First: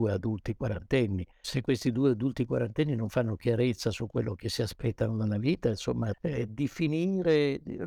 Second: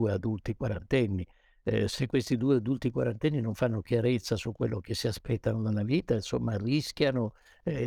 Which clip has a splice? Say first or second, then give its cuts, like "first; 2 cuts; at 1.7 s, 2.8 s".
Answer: first; 2 cuts; at 1.4 s, 6.1 s